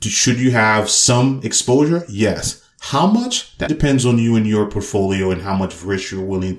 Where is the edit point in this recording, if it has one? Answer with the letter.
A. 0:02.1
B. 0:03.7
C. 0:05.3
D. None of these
B